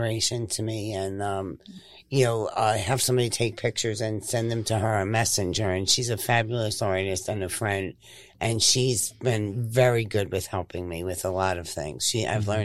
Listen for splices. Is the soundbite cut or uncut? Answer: uncut